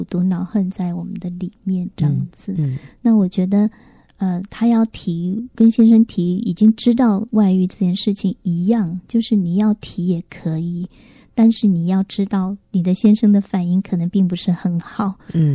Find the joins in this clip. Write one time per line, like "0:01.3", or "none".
none

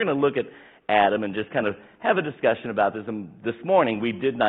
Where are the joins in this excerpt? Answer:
none

